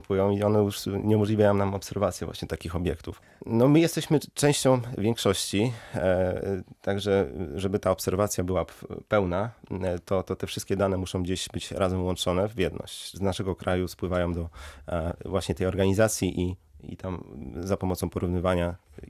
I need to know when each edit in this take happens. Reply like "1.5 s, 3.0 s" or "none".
13.1 s